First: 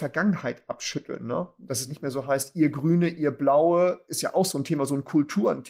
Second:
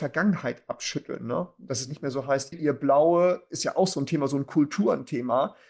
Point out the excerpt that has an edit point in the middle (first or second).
second